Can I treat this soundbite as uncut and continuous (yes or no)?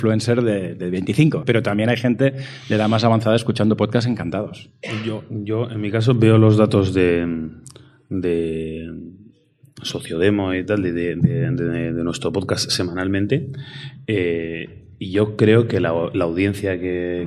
no